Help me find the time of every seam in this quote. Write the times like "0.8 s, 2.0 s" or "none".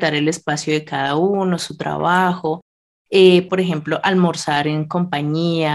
3.5 s